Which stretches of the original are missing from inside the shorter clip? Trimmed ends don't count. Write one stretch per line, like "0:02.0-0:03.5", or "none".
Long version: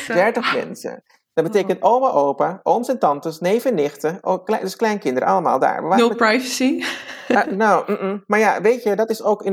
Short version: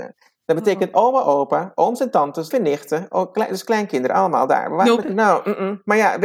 0:03.4-0:03.6
0:06.1-0:07.4